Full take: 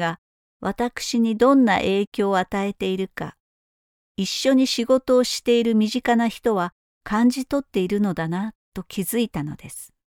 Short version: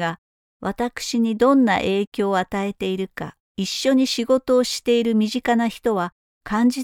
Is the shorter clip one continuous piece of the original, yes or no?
no